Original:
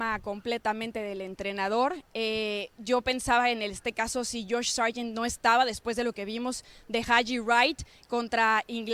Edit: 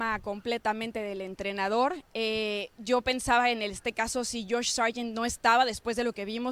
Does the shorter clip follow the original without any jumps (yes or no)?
yes